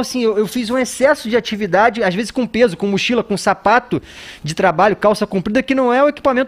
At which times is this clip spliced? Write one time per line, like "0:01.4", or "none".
none